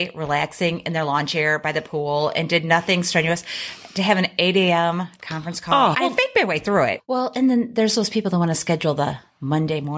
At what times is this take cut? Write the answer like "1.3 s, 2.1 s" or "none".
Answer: 5.9 s, 7.0 s